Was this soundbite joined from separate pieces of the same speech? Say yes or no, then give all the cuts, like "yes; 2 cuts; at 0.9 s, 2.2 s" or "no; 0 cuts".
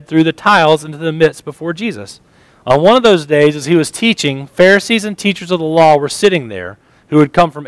yes; 1 cut; at 2.5 s